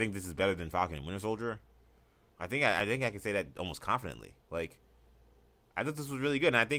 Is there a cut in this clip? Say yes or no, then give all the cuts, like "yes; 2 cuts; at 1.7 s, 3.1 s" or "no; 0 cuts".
yes; 2 cuts; at 2.3 s, 4.4 s